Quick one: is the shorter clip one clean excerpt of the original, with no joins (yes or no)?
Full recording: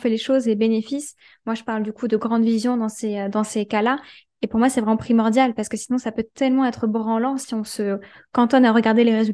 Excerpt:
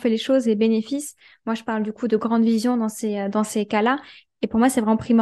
yes